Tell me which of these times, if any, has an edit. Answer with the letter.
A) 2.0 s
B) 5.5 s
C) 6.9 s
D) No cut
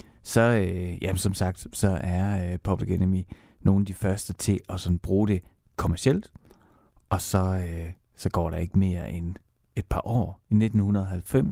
D